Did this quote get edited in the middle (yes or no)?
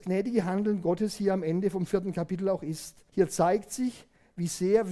yes